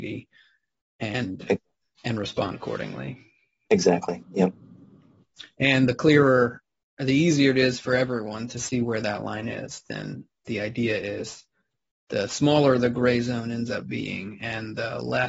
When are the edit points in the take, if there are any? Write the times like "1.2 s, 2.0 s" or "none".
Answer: none